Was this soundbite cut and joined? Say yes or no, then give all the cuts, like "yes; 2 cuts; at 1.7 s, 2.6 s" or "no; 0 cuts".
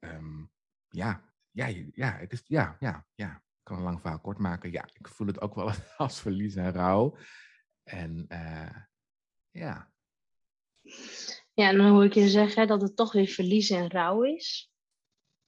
no; 0 cuts